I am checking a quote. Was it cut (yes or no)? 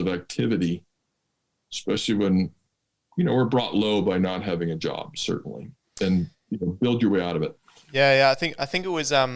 no